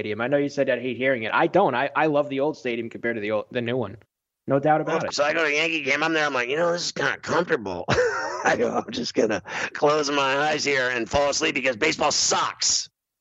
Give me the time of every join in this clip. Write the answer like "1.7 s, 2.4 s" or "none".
5.1 s